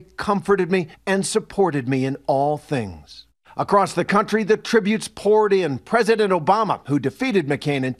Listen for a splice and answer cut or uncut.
cut